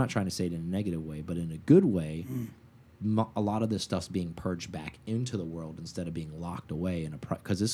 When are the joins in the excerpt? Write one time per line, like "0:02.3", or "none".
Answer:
none